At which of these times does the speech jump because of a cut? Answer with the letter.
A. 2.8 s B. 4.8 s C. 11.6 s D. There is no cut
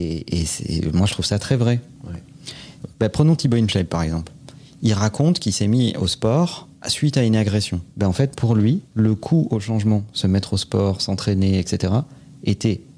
A